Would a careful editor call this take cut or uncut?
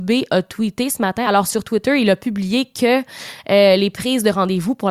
uncut